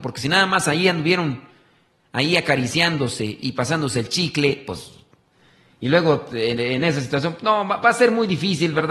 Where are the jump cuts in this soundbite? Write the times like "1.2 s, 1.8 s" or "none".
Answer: none

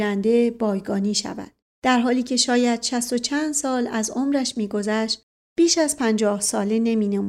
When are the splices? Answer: 1.6 s

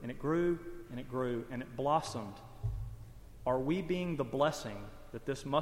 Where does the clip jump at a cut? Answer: none

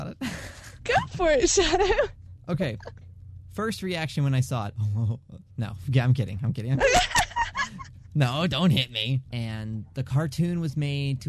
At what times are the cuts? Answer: 9.3 s

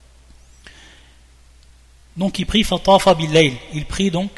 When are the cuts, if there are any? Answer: none

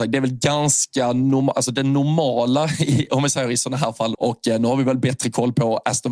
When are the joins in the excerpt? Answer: 4.1 s

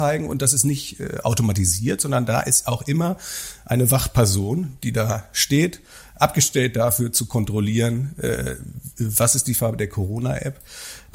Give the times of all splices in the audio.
none

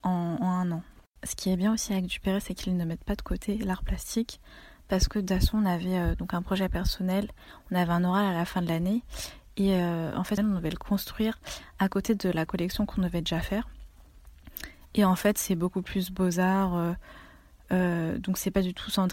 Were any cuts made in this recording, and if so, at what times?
10.4 s

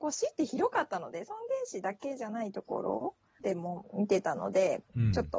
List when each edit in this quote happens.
3.4 s

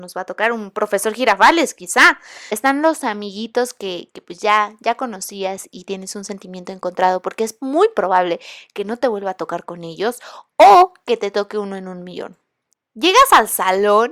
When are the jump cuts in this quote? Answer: none

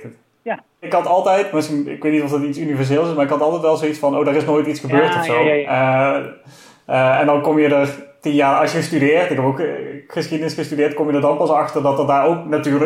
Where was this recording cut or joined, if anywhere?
none

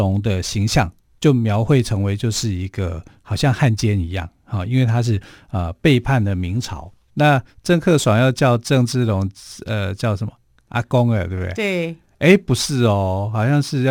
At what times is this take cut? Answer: 7.1 s

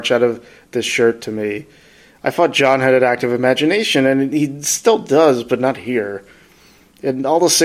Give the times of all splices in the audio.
none

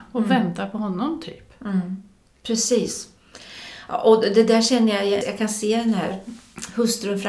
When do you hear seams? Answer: 5.2 s

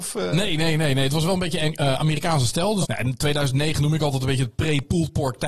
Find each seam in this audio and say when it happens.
2.8 s

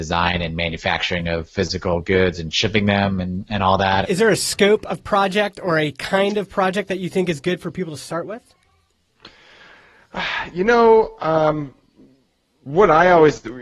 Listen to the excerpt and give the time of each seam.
4.0 s

